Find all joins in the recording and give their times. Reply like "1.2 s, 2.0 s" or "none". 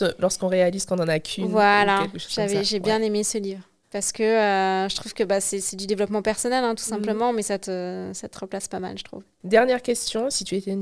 3.8 s, 9.4 s